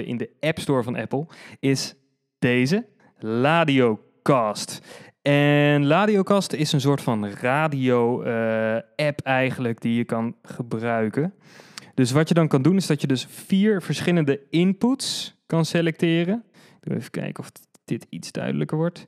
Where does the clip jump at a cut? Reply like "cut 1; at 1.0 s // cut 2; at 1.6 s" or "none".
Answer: none